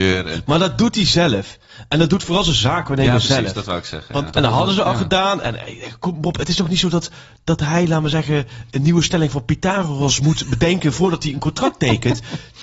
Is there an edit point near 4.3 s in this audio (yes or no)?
yes